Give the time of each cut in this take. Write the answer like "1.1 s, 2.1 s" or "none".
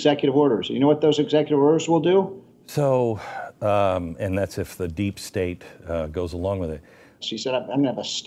2.5 s, 7.2 s